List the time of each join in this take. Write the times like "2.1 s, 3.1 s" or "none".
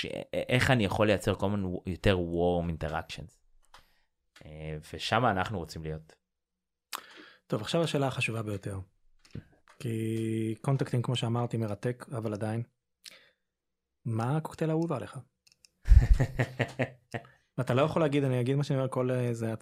none